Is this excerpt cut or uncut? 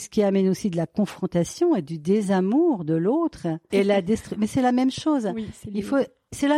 cut